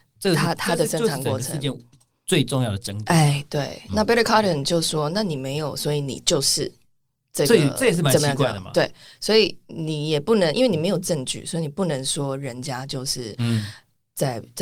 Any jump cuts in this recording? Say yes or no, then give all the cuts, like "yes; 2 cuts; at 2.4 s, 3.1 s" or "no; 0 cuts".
no; 0 cuts